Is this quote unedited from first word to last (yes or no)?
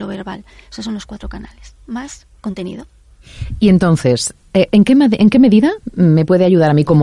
yes